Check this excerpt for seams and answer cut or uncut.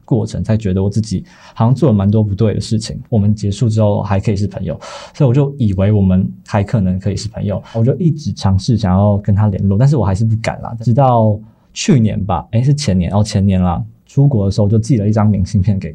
cut